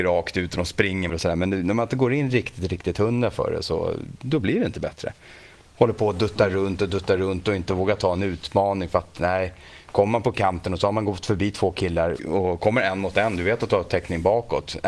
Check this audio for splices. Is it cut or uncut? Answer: cut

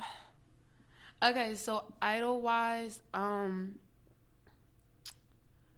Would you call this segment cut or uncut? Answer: uncut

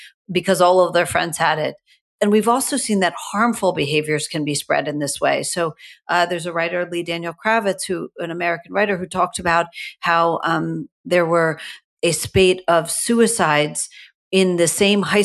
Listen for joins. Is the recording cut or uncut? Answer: cut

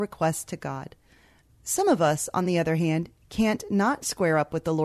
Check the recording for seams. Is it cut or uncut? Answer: uncut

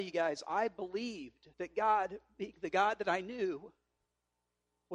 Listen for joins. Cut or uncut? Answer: cut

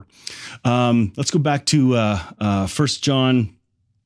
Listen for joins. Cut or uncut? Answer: uncut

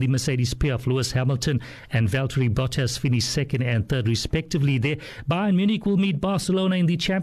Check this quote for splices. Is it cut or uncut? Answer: uncut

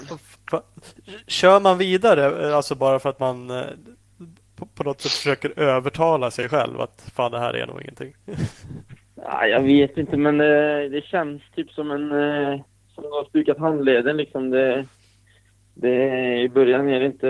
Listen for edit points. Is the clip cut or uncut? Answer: uncut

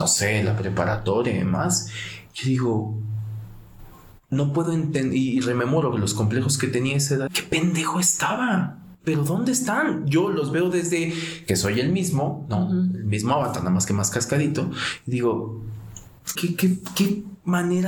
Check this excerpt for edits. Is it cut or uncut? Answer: cut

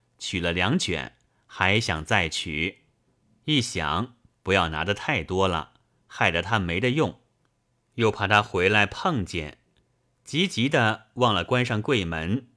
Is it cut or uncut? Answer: uncut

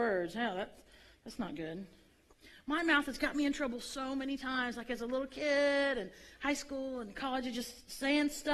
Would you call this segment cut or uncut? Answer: uncut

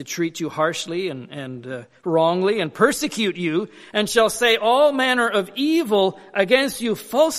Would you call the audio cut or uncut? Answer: uncut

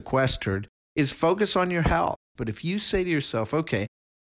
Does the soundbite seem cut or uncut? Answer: cut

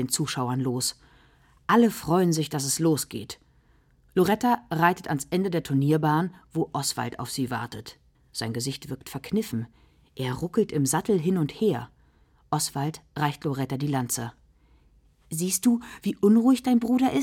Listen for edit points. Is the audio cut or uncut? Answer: cut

